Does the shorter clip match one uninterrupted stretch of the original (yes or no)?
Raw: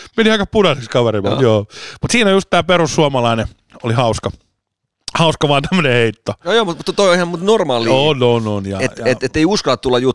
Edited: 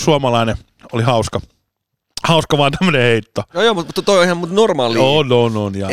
yes